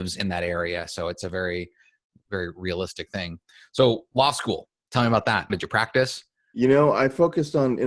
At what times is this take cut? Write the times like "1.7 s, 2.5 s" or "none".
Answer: 5.5 s